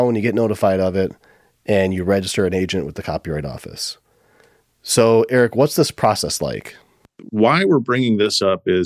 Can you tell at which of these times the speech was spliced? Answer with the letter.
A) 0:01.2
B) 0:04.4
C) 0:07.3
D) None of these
D